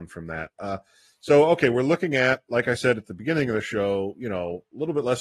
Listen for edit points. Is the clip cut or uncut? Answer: uncut